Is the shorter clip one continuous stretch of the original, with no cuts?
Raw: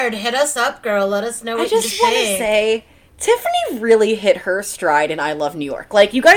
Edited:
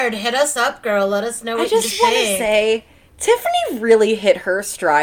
yes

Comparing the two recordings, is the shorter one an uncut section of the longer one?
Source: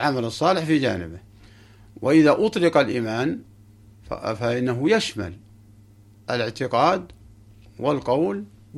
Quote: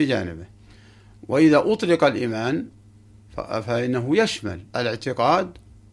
no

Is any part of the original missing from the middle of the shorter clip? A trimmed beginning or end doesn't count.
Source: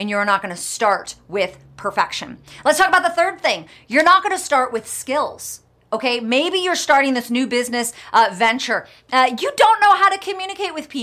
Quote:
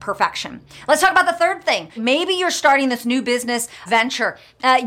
yes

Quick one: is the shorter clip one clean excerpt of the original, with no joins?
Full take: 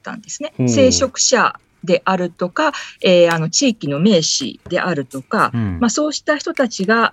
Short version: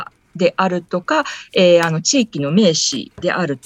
yes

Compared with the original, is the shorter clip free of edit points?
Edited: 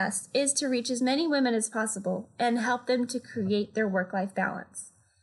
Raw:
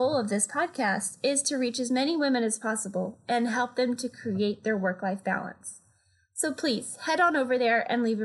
yes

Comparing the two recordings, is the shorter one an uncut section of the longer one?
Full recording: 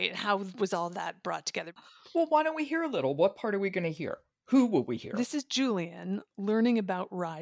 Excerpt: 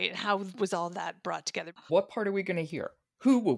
no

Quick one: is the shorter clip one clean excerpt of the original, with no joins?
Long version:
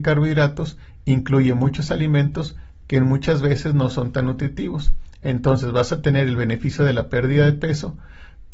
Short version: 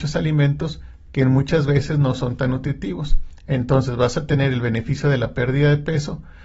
yes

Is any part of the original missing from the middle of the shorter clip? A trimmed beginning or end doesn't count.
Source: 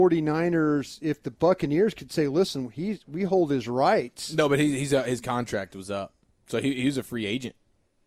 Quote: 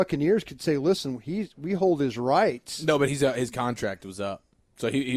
yes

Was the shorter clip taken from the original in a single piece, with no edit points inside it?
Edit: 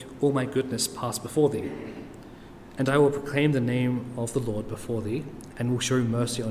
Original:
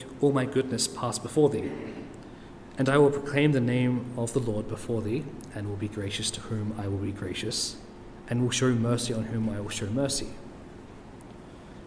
no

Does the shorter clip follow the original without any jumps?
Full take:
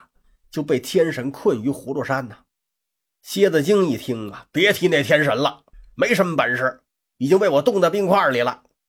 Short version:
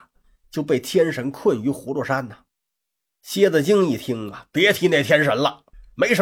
yes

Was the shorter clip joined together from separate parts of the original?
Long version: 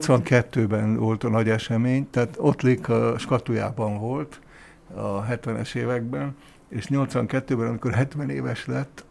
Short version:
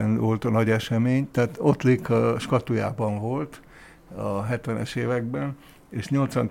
no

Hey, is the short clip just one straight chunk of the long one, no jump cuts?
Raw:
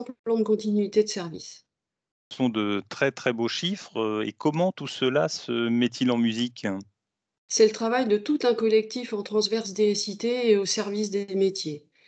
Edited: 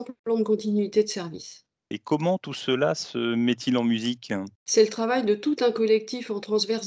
no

